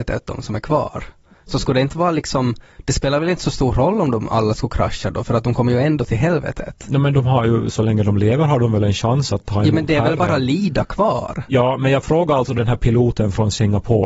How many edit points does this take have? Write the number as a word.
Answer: zero